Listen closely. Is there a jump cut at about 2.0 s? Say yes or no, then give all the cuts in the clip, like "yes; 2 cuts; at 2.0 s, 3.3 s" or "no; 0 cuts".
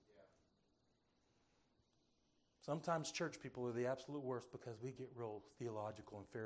no; 0 cuts